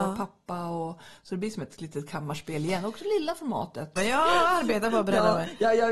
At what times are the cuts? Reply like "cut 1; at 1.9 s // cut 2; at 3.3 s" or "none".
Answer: cut 1; at 4.0 s